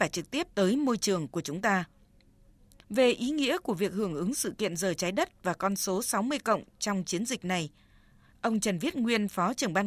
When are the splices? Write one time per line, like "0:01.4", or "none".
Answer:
none